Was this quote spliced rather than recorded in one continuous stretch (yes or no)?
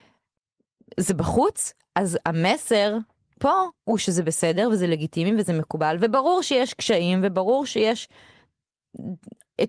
no